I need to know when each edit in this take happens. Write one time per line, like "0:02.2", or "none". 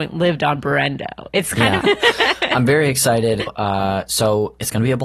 0:01.8
0:03.5